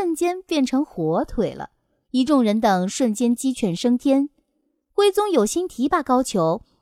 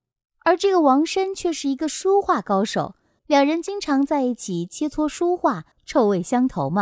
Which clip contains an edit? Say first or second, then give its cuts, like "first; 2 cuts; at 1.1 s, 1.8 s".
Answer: second; 2 cuts; at 3.2 s, 5.7 s